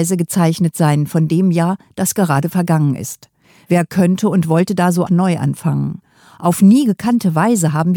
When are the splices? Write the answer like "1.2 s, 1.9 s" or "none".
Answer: 5.1 s